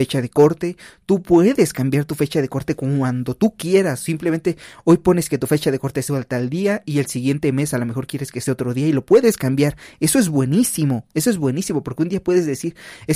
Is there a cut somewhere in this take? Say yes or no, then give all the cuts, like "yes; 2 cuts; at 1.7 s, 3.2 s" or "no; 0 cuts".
no; 0 cuts